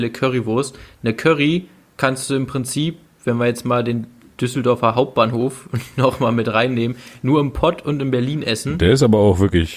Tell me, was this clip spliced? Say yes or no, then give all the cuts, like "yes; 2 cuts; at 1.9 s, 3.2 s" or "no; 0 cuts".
no; 0 cuts